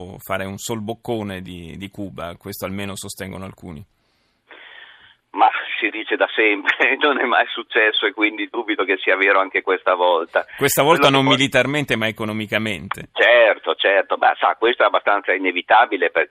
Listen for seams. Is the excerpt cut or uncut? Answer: uncut